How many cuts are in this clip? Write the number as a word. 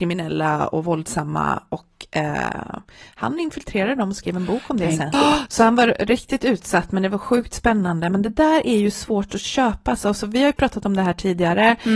one